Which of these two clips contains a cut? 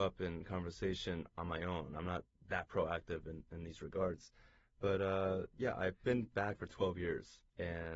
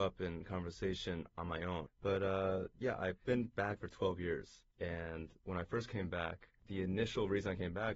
second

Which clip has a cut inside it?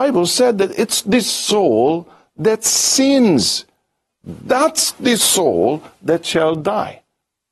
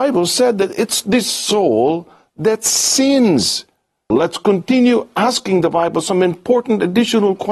second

